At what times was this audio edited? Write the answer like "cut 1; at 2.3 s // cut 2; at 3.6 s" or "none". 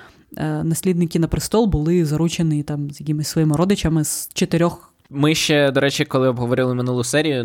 cut 1; at 5.0 s